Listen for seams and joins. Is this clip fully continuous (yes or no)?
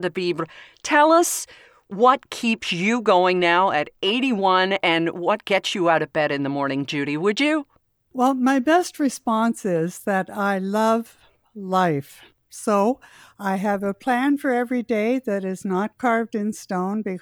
yes